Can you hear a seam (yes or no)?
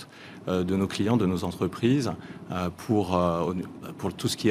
no